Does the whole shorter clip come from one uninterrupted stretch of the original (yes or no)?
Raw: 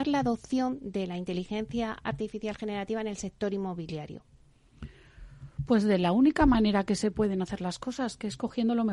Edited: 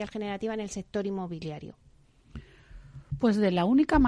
yes